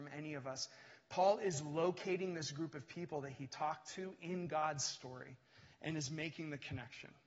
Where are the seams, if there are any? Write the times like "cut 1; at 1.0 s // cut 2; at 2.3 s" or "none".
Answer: none

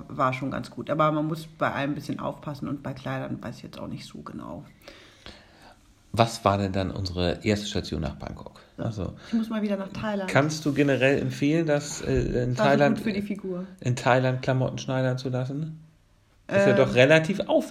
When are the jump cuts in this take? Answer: cut 1; at 8.8 s

